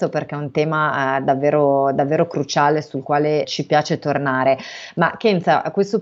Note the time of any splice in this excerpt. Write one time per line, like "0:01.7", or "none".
0:03.4

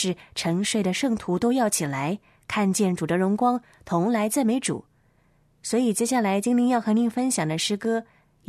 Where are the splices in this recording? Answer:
none

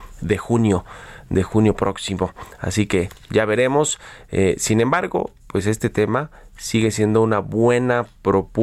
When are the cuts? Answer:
none

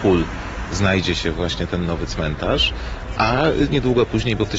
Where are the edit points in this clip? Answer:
none

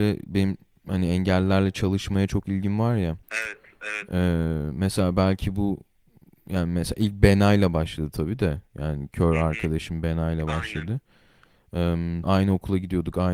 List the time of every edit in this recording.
0:03.2
0:12.2

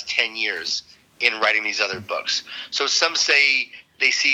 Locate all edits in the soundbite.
none

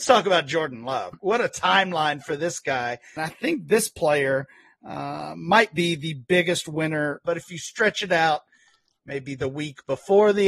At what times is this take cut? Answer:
0:01.1
0:03.2
0:07.3

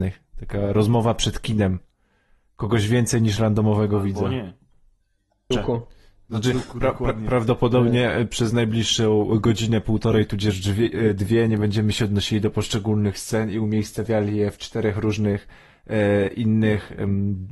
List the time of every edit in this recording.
0:05.5

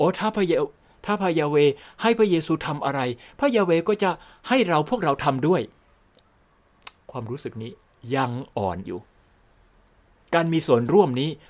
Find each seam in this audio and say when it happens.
0:08.9

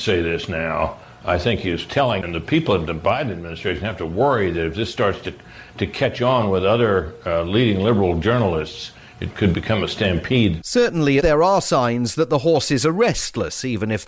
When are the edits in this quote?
0:11.2

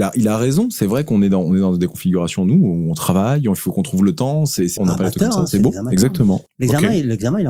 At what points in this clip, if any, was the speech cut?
0:04.8
0:06.5

